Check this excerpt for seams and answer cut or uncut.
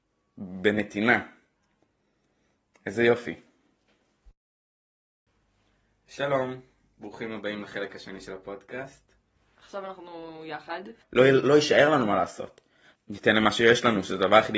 cut